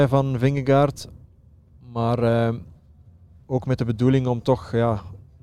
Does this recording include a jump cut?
no; 0 cuts

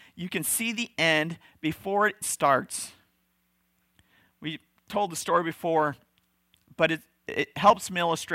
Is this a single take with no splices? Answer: no; 1 cut; at 2.2 s

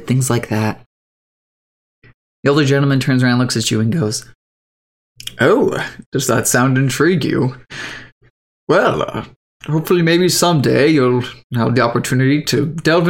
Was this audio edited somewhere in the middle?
no; 0 cuts

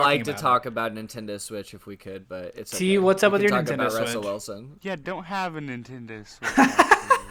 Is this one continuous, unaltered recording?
no; 1 cut; at 4.8 s

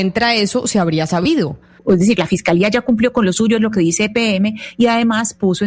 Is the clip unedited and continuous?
no; 1 cut; at 1.8 s

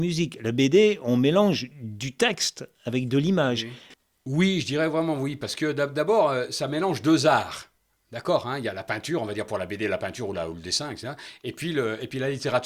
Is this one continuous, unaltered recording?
yes; 0 cuts

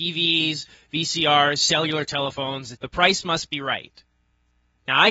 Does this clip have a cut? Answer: yes; 1 cut; at 2.7 s

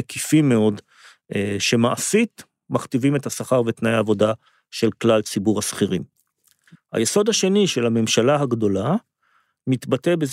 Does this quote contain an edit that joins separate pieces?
yes; 1 cut; at 6.7 s

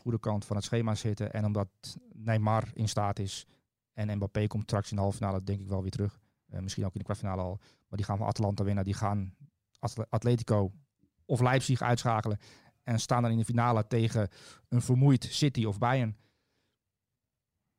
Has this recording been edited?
no; 0 cuts

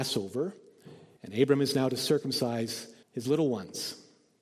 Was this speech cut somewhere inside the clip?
yes; 2 cuts; at 1.2 s, 3.0 s

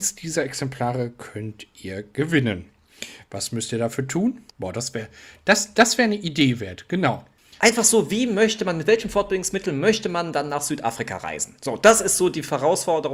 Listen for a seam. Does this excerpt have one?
yes; 1 cut; at 4.5 s

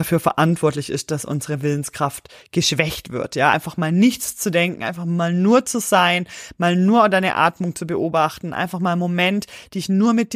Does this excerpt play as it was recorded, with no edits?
yes; 0 cuts

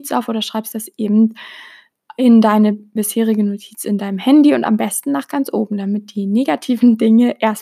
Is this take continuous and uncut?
yes; 0 cuts

